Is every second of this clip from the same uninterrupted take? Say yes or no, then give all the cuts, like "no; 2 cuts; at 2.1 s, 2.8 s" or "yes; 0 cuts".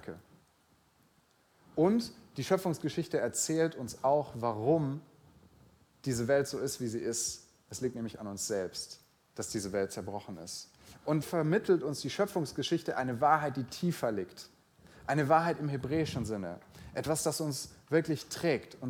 no; 1 cut; at 11.2 s